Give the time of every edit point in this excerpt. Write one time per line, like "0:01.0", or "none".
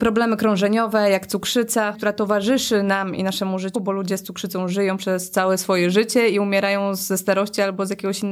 0:01.9
0:03.7